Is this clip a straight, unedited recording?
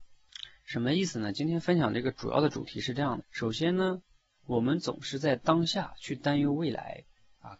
no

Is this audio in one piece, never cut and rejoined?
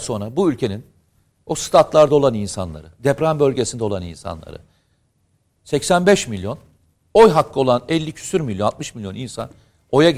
yes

